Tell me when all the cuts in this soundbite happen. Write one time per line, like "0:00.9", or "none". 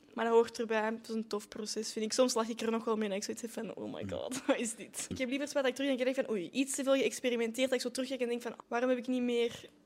0:05.1
0:08.6